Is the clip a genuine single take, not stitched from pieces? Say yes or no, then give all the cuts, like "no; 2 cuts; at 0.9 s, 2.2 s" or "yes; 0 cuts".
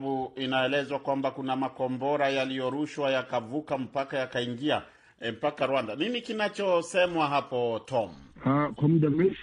yes; 0 cuts